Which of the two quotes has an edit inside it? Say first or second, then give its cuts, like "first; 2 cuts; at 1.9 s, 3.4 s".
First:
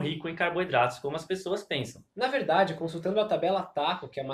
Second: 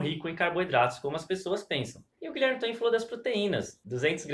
second; 1 cut; at 2.1 s